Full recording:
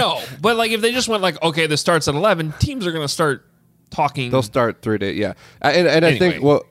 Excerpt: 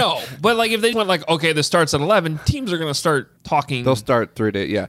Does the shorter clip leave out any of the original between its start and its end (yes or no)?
yes